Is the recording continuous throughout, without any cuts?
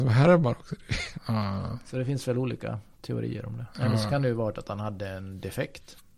no; 2 cuts; at 1.1 s, 3.7 s

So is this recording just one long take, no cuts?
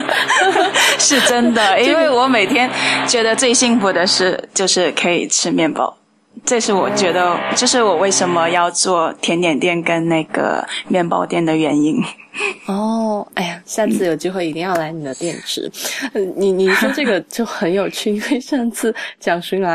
yes; 0 cuts

